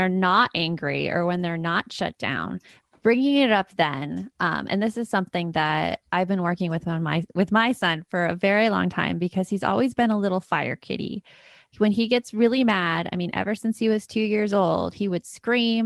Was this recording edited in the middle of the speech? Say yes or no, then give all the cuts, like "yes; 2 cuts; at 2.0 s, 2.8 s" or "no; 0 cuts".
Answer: no; 0 cuts